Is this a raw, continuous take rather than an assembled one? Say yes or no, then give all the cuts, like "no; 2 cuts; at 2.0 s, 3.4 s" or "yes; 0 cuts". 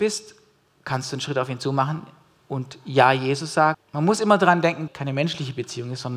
no; 2 cuts; at 3.7 s, 4.9 s